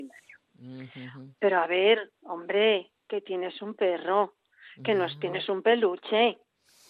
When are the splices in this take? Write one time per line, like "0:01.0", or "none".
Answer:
0:01.4